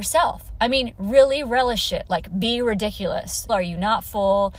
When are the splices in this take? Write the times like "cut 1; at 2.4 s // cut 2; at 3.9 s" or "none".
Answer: cut 1; at 3.5 s